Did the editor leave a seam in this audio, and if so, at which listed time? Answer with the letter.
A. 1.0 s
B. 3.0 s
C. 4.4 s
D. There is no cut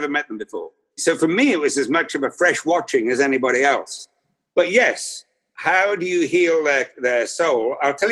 A